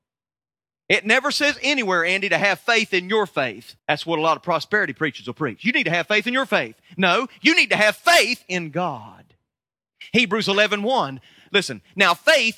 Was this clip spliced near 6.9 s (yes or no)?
no